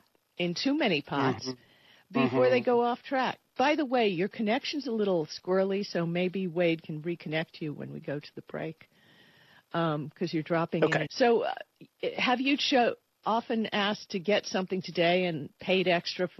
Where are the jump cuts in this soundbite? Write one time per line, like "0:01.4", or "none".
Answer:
0:11.1